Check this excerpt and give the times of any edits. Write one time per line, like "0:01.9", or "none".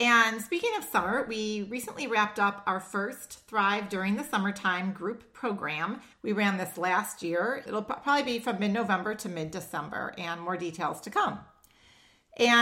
0:06.1
0:07.7